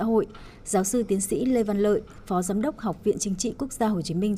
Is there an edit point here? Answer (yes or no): no